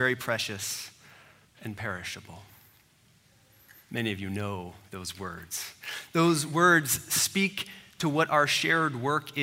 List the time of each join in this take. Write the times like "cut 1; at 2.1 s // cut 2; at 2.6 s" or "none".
none